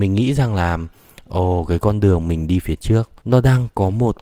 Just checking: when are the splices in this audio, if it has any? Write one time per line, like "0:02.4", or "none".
0:03.2